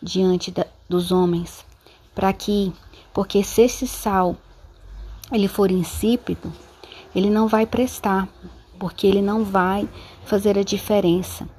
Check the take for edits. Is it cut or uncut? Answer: uncut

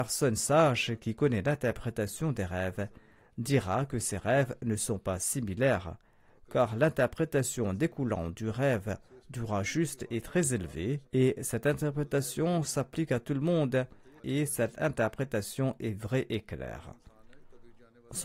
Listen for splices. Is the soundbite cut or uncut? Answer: cut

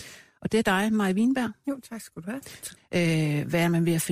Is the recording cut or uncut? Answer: cut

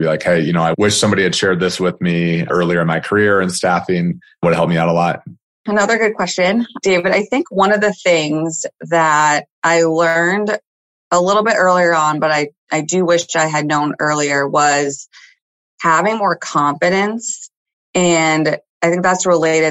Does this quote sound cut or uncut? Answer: uncut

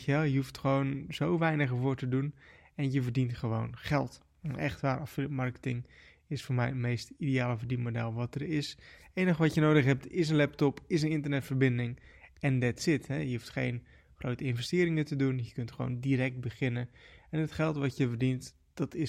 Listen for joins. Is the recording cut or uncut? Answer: uncut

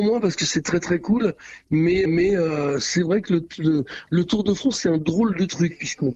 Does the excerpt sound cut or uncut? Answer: cut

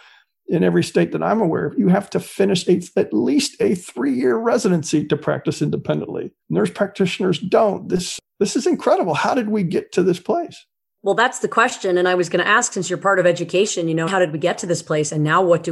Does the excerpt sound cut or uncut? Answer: cut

